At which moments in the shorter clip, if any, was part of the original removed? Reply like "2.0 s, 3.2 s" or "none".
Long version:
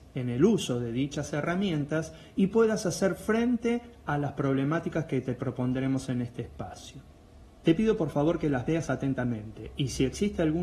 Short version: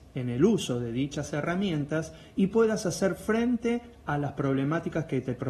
none